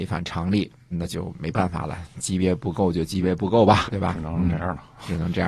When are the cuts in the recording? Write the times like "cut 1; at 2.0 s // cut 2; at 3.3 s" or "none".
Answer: cut 1; at 0.9 s // cut 2; at 3.9 s